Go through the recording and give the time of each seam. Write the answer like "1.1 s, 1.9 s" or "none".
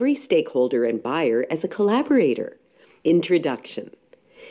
3.0 s